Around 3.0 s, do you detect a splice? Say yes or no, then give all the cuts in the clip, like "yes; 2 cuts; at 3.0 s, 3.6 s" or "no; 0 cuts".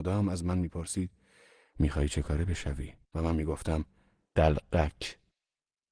yes; 1 cut; at 3.0 s